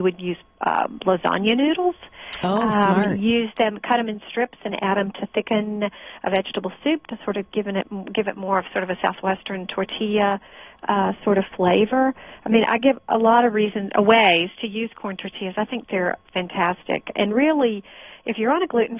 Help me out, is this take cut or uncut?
uncut